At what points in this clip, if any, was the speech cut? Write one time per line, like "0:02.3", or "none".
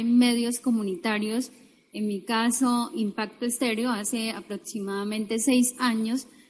none